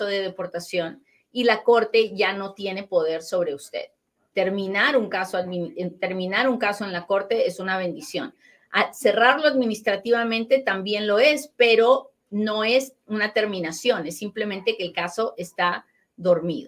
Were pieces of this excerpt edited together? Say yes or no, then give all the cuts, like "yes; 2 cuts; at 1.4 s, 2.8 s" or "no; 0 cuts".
yes; 2 cuts; at 4.3 s, 12.2 s